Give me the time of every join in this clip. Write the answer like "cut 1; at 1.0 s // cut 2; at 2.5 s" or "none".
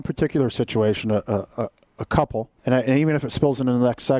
cut 1; at 2.6 s